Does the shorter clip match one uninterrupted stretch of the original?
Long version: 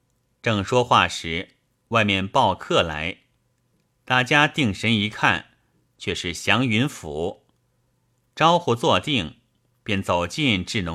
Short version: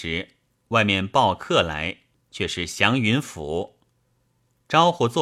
no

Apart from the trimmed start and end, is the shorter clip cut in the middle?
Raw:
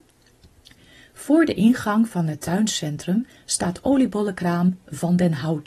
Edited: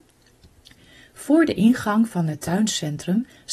no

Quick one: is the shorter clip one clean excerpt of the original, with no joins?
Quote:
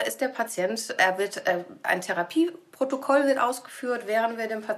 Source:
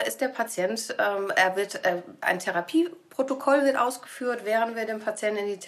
no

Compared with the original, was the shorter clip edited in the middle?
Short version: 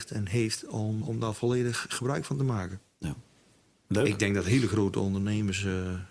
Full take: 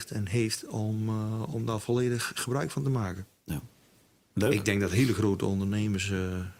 yes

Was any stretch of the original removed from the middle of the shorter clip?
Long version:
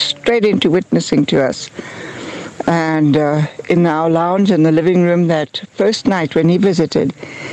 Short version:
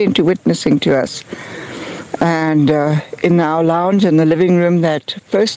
no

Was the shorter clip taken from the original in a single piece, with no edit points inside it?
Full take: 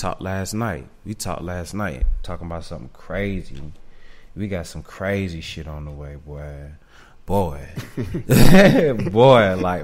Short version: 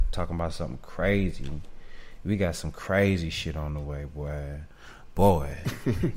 yes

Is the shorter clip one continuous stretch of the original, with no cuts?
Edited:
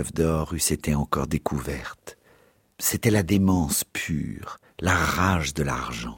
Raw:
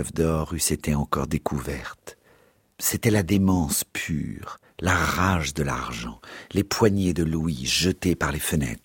yes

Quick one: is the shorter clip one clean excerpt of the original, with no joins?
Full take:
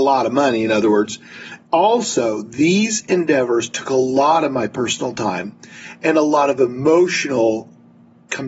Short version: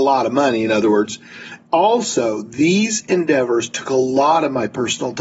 yes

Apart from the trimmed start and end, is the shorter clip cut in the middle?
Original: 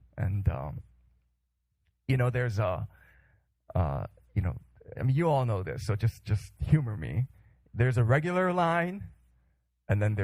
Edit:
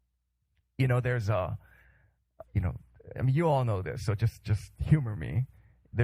yes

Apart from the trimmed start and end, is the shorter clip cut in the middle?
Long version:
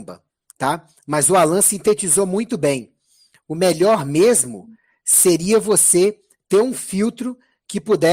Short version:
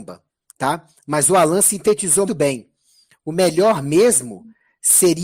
yes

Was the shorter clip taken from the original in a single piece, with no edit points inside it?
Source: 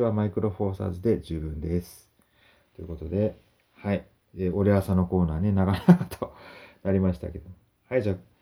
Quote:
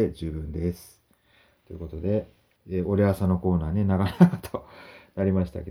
no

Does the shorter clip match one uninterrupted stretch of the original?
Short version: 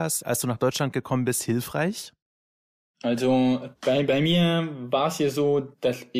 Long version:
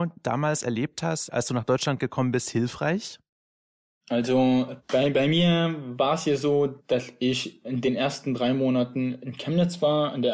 yes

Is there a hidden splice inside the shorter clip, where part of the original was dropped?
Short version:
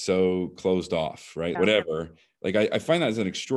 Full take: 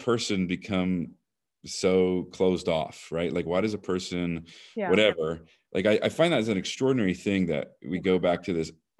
yes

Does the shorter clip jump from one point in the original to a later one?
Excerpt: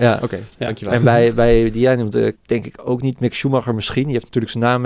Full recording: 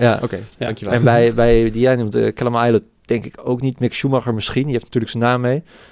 yes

